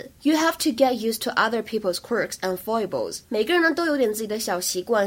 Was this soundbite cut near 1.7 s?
no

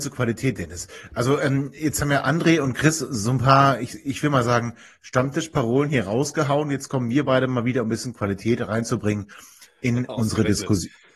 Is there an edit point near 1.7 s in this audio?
no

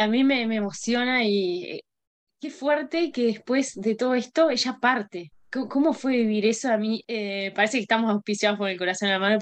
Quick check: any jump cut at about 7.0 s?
yes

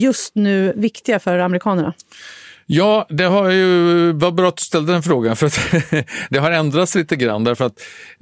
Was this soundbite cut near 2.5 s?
no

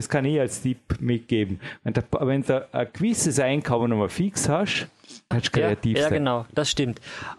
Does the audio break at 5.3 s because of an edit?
yes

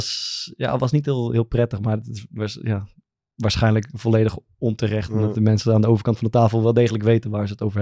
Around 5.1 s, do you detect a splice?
no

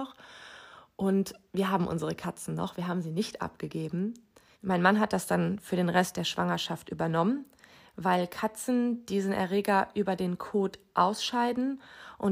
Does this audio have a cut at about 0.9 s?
no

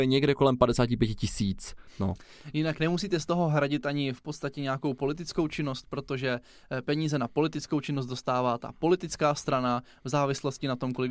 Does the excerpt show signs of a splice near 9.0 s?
no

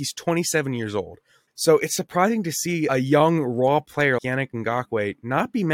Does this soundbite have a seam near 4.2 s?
yes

